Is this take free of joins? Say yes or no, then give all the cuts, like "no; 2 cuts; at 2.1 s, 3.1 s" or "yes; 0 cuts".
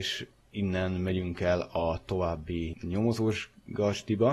no; 1 cut; at 2.7 s